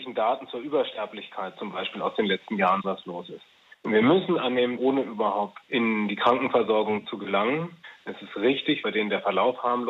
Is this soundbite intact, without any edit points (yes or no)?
no